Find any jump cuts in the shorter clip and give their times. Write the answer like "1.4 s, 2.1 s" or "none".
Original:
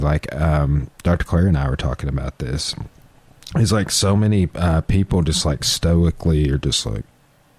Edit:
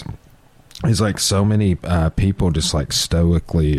none